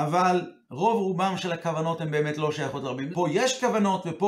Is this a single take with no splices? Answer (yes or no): no